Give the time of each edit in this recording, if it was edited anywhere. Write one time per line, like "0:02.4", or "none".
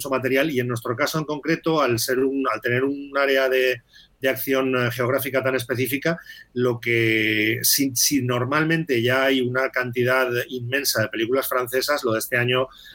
none